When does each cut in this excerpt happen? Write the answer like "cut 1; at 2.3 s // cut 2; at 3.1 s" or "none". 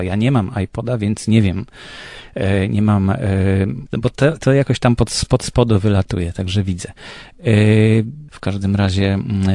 cut 1; at 3.9 s // cut 2; at 8.3 s